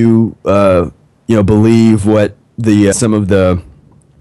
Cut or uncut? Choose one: cut